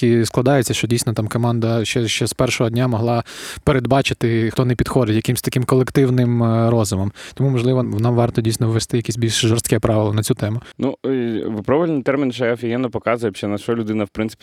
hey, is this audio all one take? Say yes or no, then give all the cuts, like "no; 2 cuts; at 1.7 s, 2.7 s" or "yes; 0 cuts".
no; 2 cuts; at 4.5 s, 7.8 s